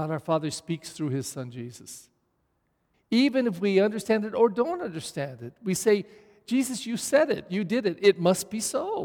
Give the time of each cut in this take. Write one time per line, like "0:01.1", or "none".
0:02.9